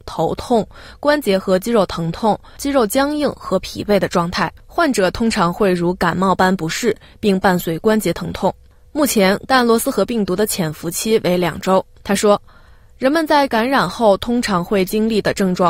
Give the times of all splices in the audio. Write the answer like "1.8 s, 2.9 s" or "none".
4.6 s, 9.5 s, 12.0 s